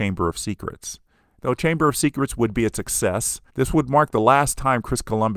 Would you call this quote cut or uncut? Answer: cut